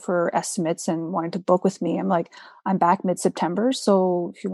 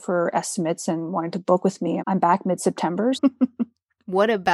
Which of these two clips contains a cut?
second; 2 cuts; at 2.0 s, 3.1 s

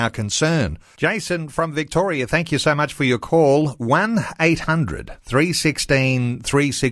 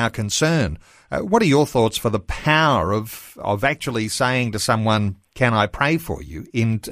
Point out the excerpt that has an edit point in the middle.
first; 1 cut; at 0.9 s

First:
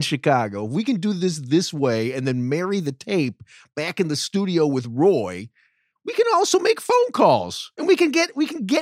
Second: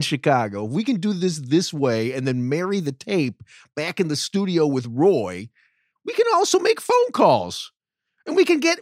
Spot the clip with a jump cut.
first; 1 cut; at 7.7 s

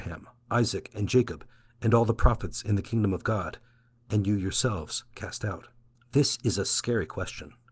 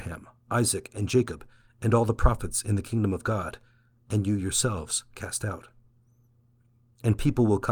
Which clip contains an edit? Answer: first; 1 cut; at 6.0 s

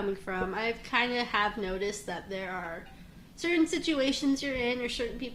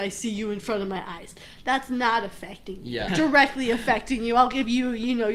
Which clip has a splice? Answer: second; 1 cut; at 3.1 s

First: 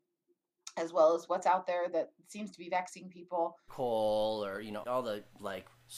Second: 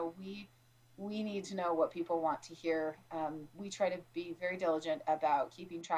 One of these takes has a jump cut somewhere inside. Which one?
first; 2 cuts; at 3.7 s, 4.8 s

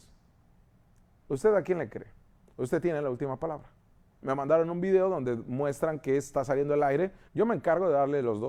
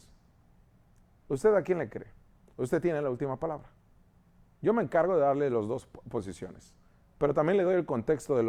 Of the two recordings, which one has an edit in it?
first; 2 cuts; at 4.1 s, 7.3 s

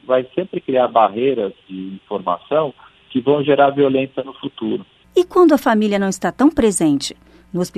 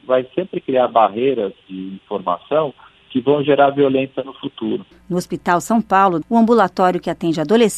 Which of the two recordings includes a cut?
second; 2 cuts; at 4.9 s, 6.2 s

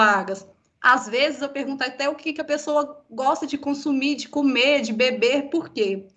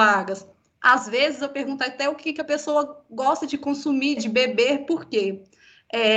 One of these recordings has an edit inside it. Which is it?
second; 1 cut; at 4.2 s

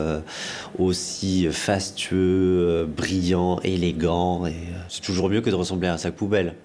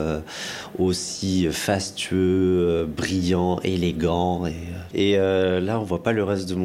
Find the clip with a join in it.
second; 1 cut; at 4.9 s

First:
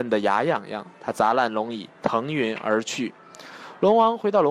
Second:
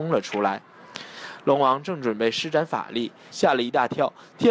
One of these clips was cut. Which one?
second; 1 cut; at 3.3 s

